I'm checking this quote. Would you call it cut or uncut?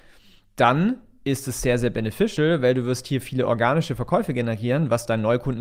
uncut